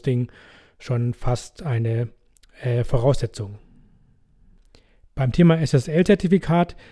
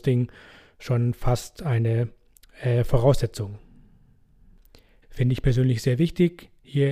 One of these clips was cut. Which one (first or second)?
second